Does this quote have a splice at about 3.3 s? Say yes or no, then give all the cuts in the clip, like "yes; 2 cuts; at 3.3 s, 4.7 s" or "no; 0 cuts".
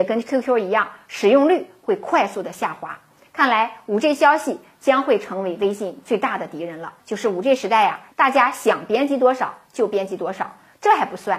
no; 2 cuts; at 7.0 s, 8.1 s